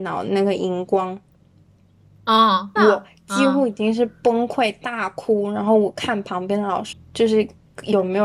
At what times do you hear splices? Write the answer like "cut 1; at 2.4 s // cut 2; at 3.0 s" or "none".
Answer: cut 1; at 2.8 s // cut 2; at 6.9 s